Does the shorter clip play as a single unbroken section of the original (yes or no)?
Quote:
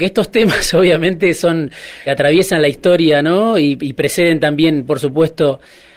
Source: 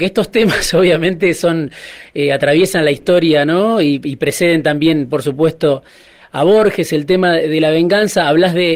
no